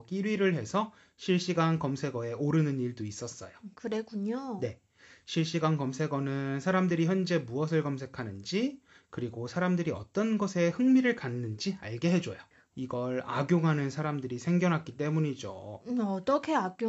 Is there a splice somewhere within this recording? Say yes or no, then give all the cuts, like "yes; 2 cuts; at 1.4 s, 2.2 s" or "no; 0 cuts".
yes; 2 cuts; at 3.7 s, 12.7 s